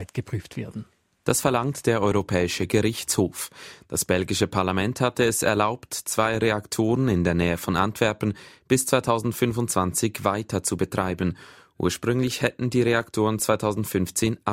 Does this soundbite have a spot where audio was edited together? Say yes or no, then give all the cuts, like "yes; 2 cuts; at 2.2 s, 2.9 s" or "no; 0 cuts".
no; 0 cuts